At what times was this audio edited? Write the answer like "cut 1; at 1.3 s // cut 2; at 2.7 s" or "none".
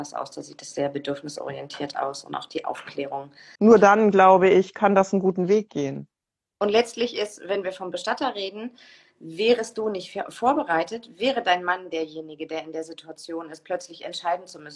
cut 1; at 3.6 s